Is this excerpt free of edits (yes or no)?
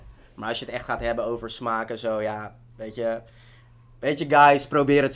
yes